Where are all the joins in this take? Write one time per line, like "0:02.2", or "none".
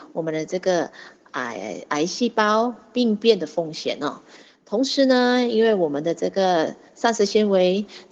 none